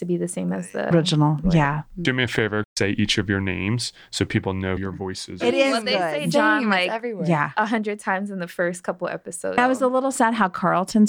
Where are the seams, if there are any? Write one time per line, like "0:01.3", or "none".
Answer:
0:05.4